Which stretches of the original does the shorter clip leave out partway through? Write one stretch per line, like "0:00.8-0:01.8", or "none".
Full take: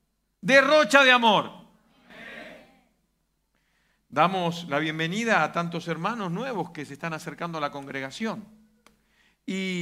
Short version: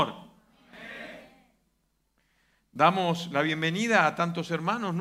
none